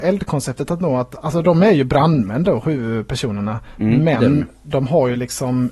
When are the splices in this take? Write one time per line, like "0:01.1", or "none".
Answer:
none